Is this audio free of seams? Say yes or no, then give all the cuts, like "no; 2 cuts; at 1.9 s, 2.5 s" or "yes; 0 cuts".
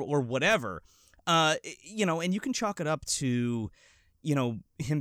yes; 0 cuts